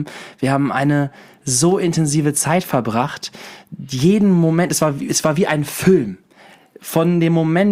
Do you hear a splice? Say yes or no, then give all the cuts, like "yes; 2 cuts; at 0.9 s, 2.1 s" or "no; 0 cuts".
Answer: no; 0 cuts